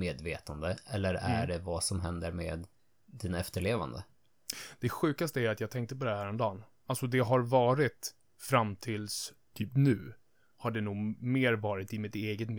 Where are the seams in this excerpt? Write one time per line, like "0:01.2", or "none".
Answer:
none